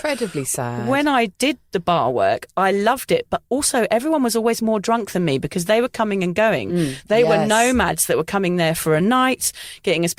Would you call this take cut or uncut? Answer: uncut